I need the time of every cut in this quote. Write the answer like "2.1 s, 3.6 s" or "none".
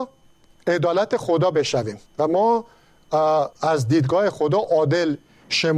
2.1 s, 3.5 s